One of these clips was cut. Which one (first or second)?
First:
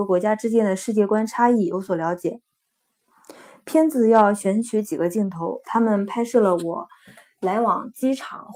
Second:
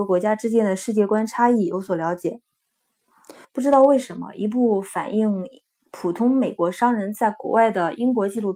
second